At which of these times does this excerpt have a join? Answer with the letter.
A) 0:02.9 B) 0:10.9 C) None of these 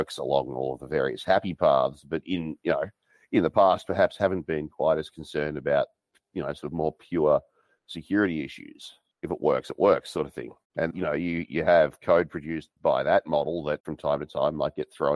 B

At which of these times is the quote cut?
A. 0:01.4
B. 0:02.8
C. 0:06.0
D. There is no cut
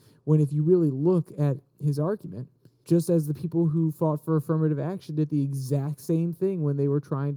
B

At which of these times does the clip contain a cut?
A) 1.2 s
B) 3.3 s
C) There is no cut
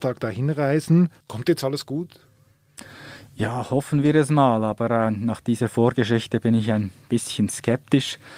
A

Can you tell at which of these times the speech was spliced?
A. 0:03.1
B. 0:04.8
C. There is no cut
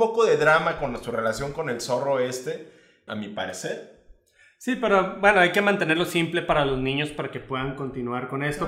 A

